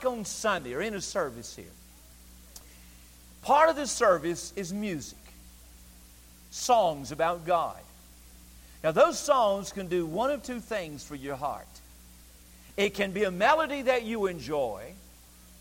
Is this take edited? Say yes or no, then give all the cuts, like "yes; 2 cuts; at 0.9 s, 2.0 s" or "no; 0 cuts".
no; 0 cuts